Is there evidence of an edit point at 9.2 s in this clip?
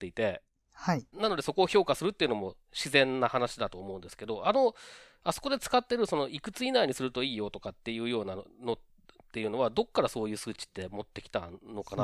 no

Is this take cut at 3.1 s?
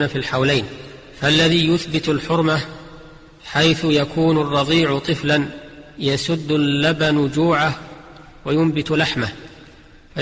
no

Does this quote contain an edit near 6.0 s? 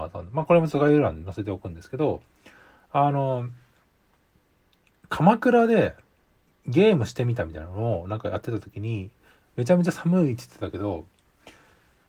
no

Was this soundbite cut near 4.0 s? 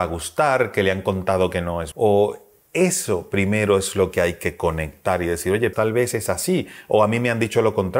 no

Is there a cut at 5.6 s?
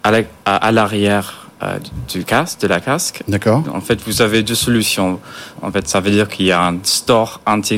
yes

